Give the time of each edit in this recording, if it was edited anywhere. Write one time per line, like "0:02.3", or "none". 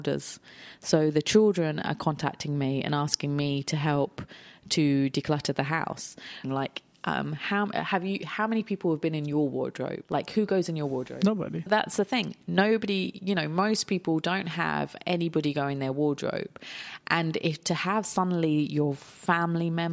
0:06.4
0:11.7